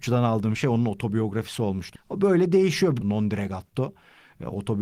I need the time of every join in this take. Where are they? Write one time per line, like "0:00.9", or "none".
0:02.0
0:03.0

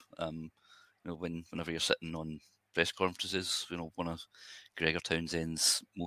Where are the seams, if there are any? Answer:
none

